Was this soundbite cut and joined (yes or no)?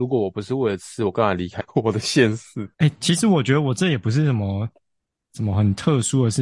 yes